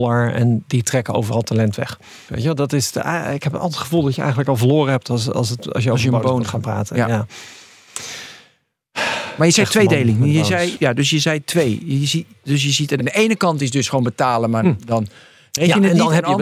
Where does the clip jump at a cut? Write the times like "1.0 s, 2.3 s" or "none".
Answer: 2.3 s, 10.8 s, 13.0 s